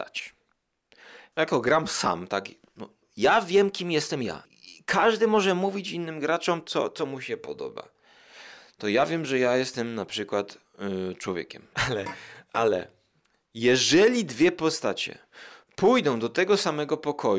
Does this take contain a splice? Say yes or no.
yes